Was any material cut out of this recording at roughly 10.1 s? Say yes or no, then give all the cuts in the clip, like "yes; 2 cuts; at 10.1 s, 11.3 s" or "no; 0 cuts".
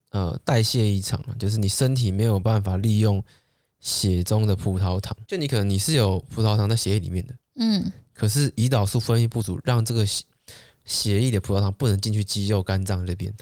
no; 0 cuts